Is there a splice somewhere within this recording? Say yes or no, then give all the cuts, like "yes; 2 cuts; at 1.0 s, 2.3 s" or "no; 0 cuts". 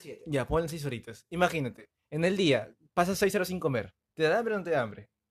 no; 0 cuts